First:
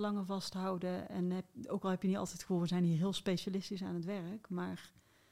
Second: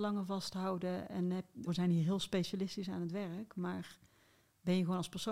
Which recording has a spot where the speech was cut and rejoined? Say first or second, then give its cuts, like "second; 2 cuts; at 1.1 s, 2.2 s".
second; 1 cut; at 1.7 s